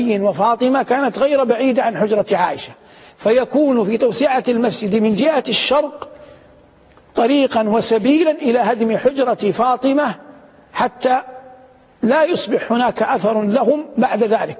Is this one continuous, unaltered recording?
yes; 0 cuts

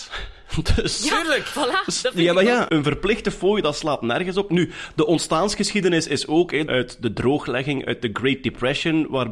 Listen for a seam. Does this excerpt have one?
yes; 1 cut; at 6.7 s

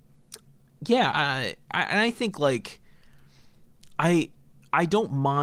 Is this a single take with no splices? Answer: no; 1 cut; at 1.1 s

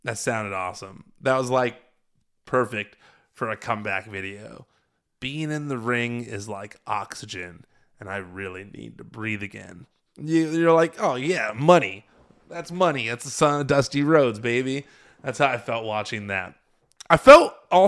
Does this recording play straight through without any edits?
yes; 0 cuts

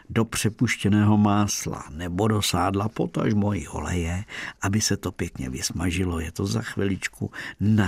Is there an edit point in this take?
no; 0 cuts

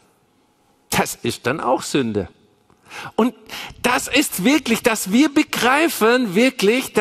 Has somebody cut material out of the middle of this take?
no; 0 cuts

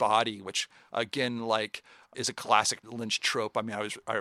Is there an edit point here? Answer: no; 0 cuts

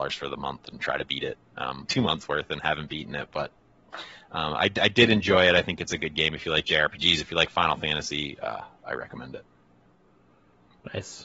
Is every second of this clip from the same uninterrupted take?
no; 1 cut; at 1.9 s

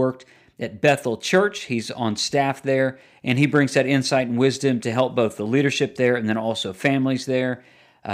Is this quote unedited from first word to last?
yes; 0 cuts

